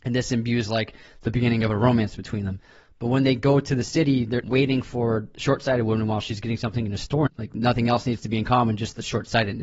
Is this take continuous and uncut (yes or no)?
no